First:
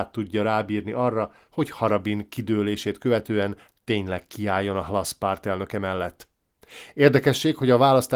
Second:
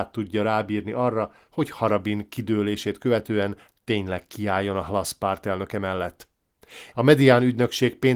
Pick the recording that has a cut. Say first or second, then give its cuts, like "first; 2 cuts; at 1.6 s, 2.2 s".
second; 1 cut; at 6.9 s